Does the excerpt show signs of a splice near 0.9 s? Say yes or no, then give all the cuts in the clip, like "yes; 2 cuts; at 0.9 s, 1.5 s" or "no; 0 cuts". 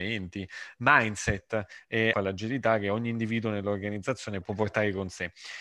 no; 2 cuts; at 2.1 s, 4.4 s